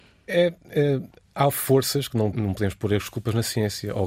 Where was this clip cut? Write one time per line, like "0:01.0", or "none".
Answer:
0:02.3